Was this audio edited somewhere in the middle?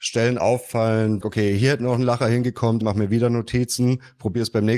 yes; 2 cuts; at 1.2 s, 2.8 s

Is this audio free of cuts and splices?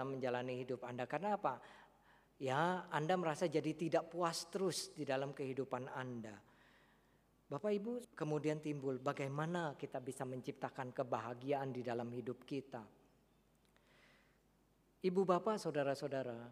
no; 1 cut; at 8.0 s

